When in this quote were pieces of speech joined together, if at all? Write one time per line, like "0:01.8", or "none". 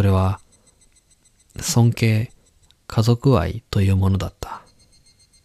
0:02.7